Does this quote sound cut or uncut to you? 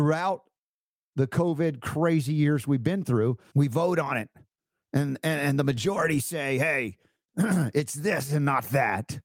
cut